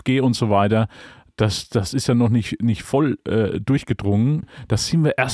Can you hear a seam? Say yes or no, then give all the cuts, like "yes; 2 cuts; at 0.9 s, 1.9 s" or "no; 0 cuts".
yes; 1 cut; at 4.4 s